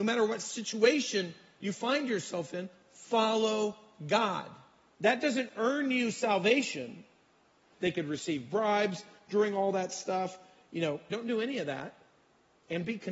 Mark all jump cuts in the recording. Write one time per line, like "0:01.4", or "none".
0:04.9
0:07.7
0:11.1

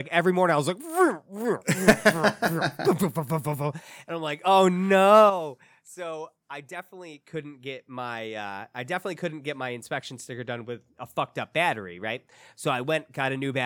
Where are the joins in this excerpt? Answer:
none

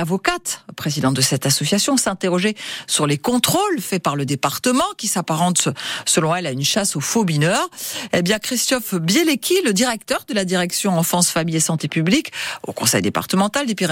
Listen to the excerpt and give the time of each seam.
none

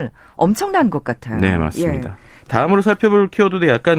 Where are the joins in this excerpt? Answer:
0:02.5

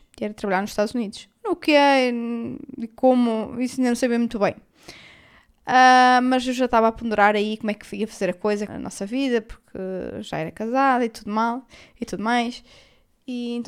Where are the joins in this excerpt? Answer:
0:08.7

